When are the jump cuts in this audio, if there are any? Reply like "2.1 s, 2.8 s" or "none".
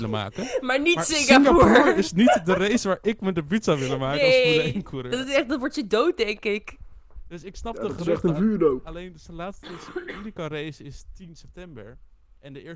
none